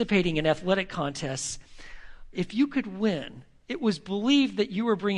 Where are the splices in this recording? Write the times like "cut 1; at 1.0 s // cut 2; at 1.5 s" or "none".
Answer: cut 1; at 2.3 s